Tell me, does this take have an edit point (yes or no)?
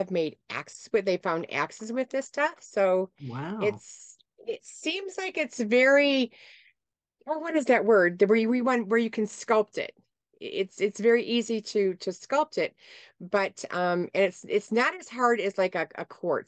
yes